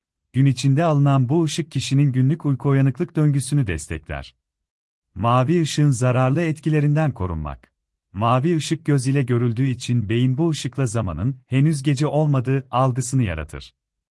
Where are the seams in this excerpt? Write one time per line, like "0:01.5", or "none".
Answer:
0:05.0
0:08.0